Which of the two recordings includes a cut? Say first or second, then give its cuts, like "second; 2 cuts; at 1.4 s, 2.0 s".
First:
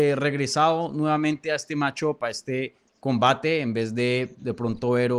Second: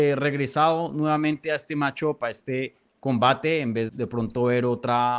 second; 1 cut; at 3.9 s